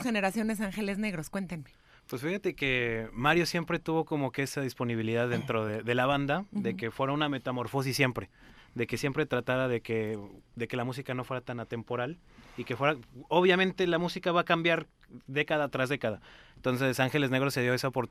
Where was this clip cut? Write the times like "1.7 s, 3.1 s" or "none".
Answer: none